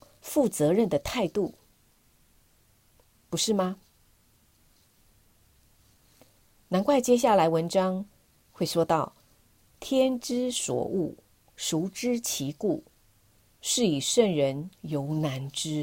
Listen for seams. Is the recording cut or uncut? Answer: uncut